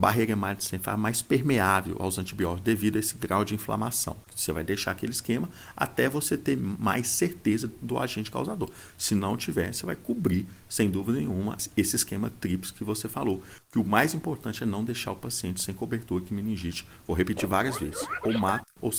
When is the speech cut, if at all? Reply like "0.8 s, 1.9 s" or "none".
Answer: 4.3 s